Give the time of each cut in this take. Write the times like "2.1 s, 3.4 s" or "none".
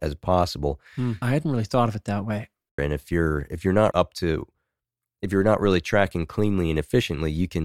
1.2 s, 2.8 s, 3.9 s